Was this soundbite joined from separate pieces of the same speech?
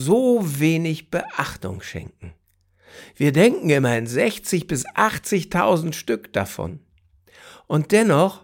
no; 0 cuts

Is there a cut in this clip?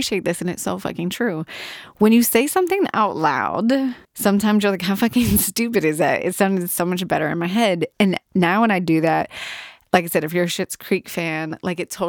yes; 1 cut; at 4.0 s

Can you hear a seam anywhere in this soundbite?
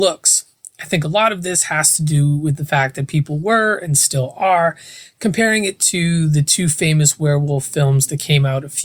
no; 0 cuts

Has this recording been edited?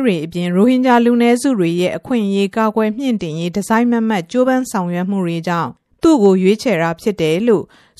no; 0 cuts

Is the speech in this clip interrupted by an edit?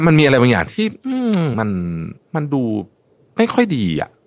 yes; 1 cut; at 1.5 s

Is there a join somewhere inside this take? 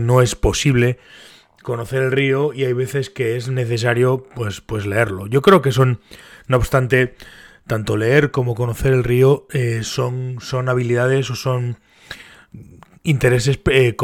no; 0 cuts

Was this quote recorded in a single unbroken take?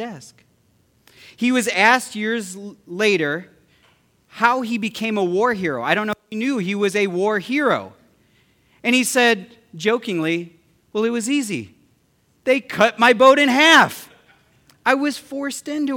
yes; 0 cuts

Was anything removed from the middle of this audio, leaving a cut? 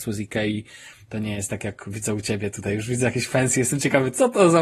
no; 0 cuts

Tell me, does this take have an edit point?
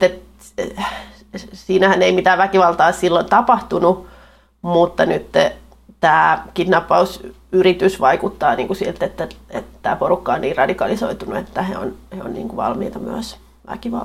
no; 0 cuts

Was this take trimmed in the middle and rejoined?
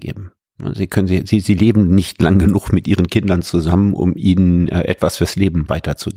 no; 0 cuts

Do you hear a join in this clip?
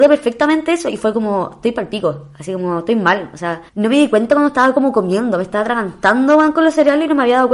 yes; 1 cut; at 3.7 s

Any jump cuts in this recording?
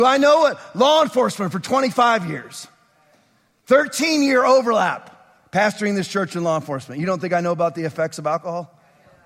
no; 0 cuts

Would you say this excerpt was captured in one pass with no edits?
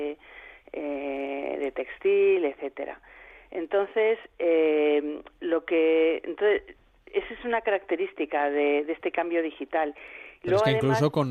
yes; 0 cuts

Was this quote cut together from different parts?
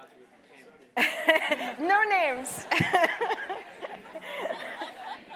yes; 1 cut; at 1.8 s

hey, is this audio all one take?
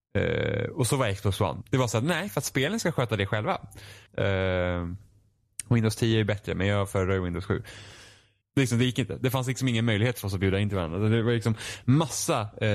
no; 3 cuts; at 1.6 s, 4.1 s, 8.4 s

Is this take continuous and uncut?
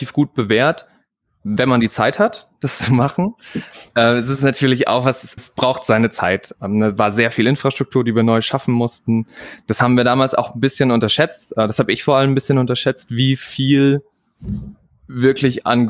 no; 1 cut; at 5.4 s

